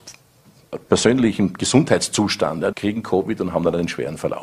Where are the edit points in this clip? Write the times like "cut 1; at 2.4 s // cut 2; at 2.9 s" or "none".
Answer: cut 1; at 2.7 s